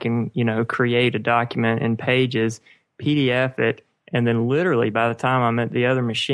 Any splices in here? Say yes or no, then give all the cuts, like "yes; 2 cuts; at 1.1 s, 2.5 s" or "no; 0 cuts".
no; 0 cuts